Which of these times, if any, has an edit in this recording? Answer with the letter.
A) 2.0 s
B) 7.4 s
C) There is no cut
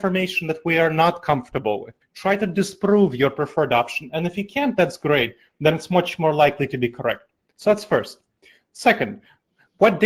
A